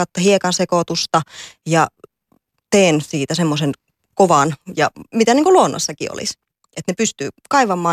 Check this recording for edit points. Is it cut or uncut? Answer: uncut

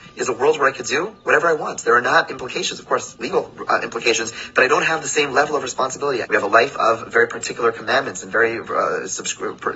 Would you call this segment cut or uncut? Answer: cut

